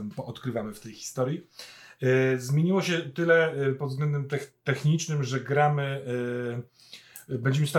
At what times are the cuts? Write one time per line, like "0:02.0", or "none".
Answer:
none